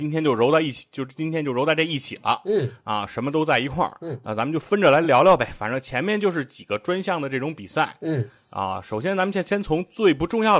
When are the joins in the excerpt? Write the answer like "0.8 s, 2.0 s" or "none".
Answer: none